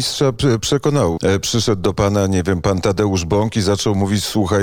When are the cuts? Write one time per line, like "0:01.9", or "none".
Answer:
0:01.2